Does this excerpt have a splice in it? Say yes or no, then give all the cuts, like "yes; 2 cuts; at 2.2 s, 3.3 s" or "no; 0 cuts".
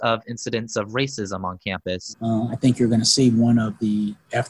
yes; 1 cut; at 2.1 s